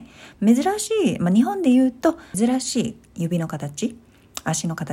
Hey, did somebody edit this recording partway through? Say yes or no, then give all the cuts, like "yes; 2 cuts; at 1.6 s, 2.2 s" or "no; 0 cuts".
yes; 1 cut; at 2.3 s